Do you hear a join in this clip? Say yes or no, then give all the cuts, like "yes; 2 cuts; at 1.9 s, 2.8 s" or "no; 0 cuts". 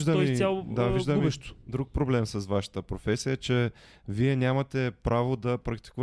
no; 0 cuts